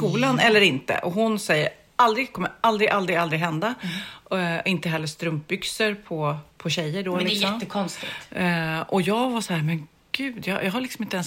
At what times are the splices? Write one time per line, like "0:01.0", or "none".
0:06.5